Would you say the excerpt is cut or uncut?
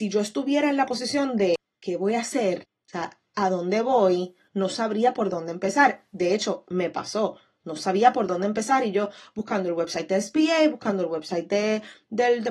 uncut